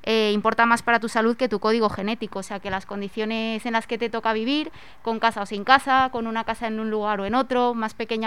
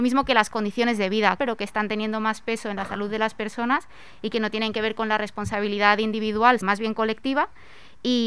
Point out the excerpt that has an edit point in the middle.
second; 2 cuts; at 1.4 s, 6.6 s

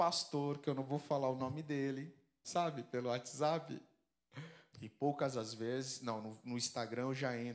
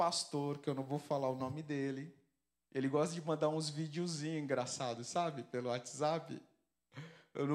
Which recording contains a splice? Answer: first; 2 cuts; at 2.4 s, 4.7 s

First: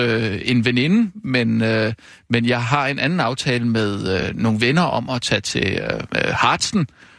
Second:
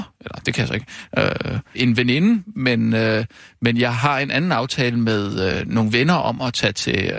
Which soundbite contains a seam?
second; 1 cut; at 1.7 s

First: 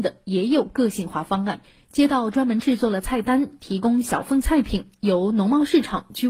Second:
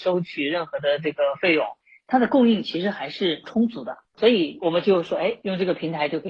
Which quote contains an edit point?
second; 1 cut; at 1.8 s

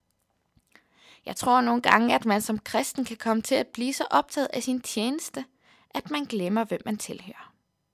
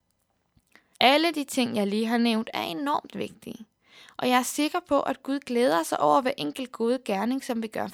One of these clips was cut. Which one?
second; 1 cut; at 0.9 s

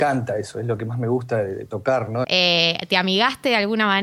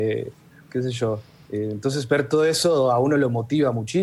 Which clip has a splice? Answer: first; 1 cut; at 2.2 s

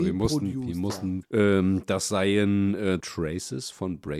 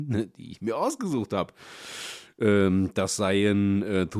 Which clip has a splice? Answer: first; 2 cuts; at 1.2 s, 3.0 s

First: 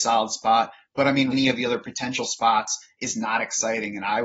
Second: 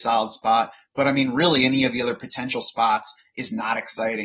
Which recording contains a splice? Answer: first; 1 cut; at 1.3 s

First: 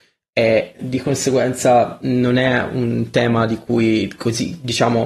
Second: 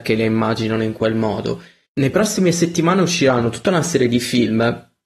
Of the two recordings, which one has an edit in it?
second; 1 cut; at 1.9 s

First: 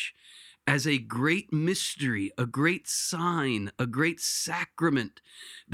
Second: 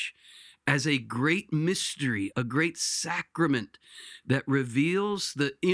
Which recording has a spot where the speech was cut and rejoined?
second; 1 cut; at 2.3 s

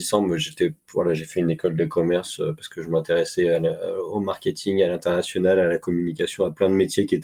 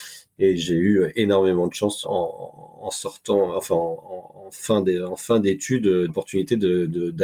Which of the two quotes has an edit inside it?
second; 2 cuts; at 2.0 s, 6.1 s

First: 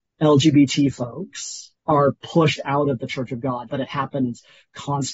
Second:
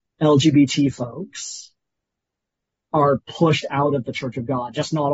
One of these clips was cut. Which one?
first; 2 cuts; at 1.8 s, 3.7 s

